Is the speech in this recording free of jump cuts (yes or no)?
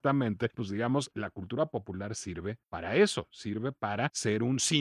no